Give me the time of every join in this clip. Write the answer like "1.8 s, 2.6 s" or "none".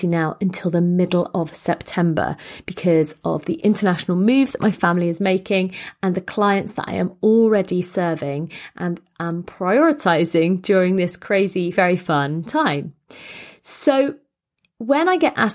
11.7 s